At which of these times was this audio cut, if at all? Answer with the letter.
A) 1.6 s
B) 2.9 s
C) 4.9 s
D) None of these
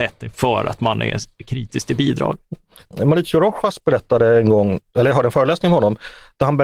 B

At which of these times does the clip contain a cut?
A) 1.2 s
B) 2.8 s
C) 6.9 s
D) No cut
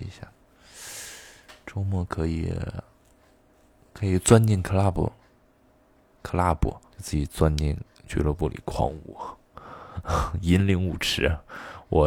C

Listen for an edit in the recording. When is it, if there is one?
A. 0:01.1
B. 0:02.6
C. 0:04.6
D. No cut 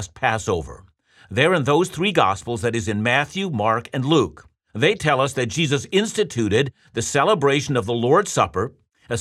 D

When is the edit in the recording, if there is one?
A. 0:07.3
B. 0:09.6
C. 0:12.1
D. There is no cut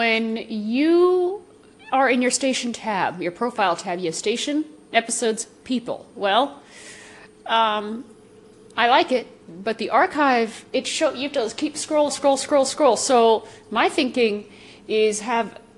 C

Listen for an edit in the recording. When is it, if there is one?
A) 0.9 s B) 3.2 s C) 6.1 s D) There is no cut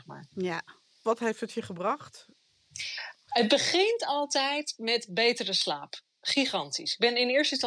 D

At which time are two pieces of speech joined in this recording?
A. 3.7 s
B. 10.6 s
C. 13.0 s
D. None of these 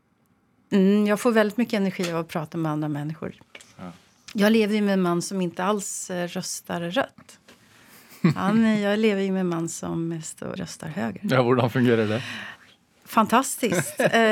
B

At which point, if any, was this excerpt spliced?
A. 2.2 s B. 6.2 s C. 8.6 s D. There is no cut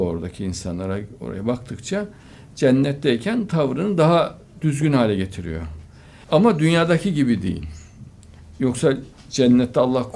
B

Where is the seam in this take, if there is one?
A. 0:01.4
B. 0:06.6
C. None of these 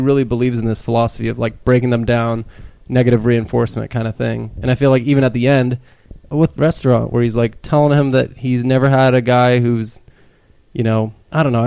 B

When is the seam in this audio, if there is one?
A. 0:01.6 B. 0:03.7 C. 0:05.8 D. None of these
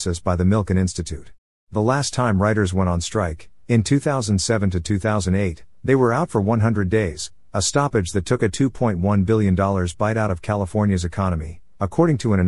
A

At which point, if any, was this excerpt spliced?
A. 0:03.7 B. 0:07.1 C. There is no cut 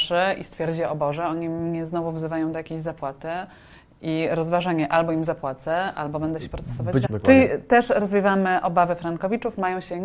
B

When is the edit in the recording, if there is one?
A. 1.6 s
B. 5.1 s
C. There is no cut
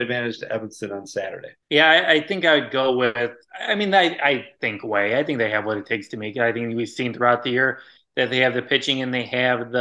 A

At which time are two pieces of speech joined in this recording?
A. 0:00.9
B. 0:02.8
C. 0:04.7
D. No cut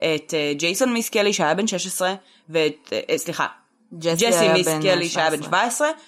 D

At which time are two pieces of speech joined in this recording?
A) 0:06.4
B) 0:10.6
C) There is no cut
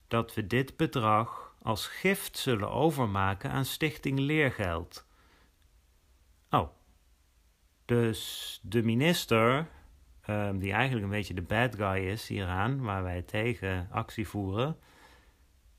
A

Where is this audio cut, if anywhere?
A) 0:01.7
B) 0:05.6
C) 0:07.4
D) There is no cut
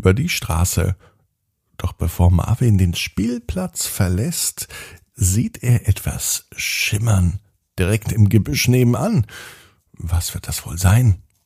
D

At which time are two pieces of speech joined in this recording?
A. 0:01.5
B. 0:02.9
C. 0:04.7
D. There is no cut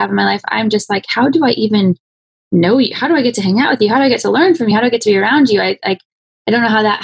D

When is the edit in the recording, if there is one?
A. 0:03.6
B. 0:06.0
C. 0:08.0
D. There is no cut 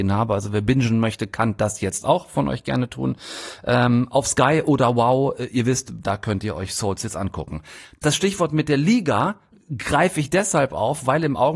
B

